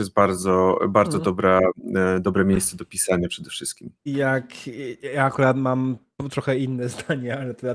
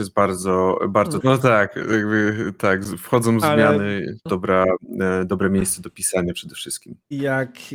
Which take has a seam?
second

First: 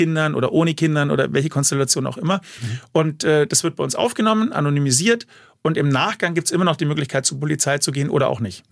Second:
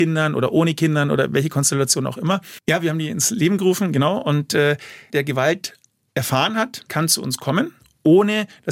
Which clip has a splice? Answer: second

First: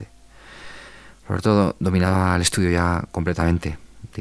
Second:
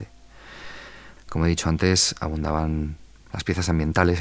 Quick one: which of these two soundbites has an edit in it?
second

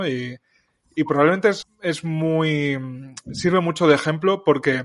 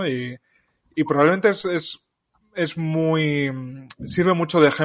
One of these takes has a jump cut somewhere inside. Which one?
first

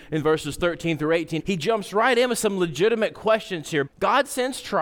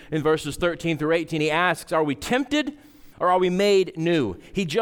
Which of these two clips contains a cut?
first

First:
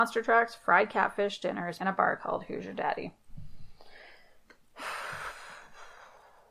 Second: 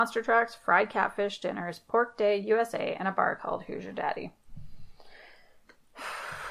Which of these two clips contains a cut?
first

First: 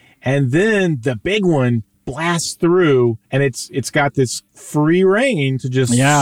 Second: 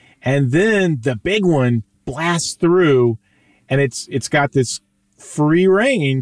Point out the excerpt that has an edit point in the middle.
first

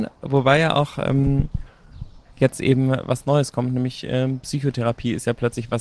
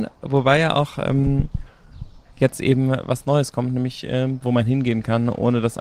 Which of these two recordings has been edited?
second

